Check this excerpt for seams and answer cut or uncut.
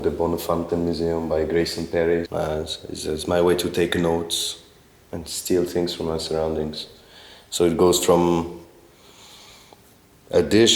cut